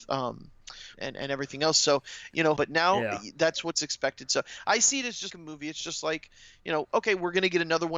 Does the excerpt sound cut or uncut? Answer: cut